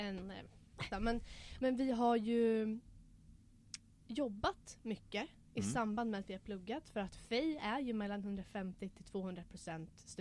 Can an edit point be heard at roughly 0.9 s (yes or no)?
yes